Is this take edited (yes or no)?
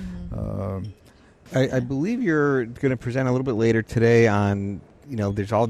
yes